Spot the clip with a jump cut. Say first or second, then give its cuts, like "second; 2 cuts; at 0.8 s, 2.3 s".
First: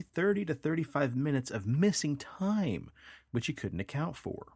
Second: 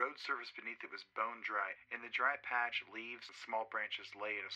second; 2 cuts; at 1.8 s, 3.3 s